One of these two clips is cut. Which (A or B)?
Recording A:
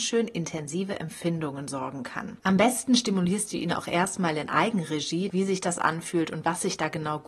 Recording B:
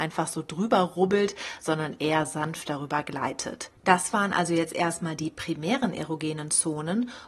A